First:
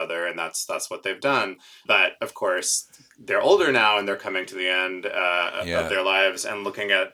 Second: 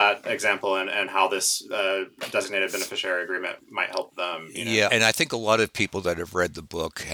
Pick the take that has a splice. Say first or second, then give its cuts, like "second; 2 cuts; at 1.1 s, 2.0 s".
second; 1 cut; at 4.9 s